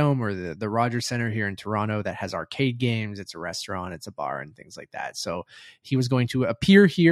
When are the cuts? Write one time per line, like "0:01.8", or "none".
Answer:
none